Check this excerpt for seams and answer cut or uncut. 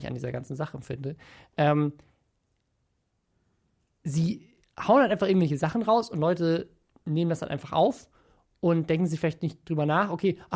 uncut